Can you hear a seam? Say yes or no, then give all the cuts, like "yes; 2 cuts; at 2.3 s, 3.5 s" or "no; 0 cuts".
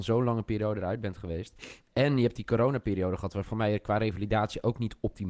no; 0 cuts